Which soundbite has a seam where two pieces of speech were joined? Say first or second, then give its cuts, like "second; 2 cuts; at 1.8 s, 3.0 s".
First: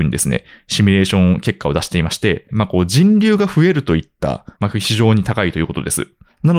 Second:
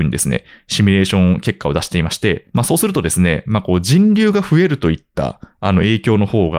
first; 2 cuts; at 2.5 s, 4.6 s